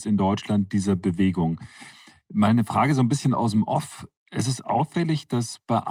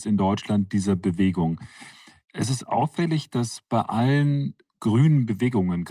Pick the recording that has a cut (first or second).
second